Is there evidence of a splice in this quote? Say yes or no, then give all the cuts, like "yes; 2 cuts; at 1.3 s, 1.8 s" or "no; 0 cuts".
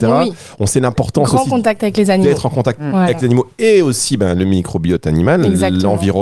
no; 0 cuts